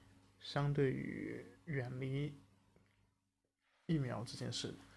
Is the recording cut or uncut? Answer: uncut